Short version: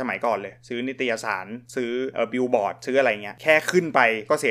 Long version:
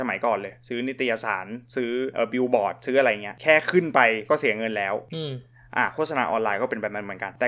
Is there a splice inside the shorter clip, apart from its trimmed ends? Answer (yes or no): no